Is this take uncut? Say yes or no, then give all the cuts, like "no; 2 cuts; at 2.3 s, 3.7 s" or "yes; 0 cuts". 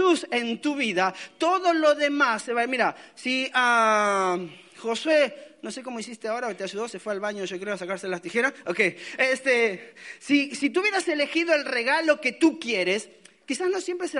yes; 0 cuts